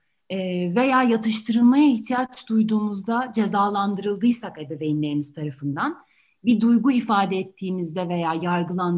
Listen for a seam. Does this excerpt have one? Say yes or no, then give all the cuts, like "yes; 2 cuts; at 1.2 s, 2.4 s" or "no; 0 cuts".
no; 0 cuts